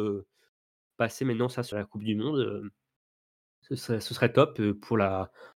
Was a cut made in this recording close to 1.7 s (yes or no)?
yes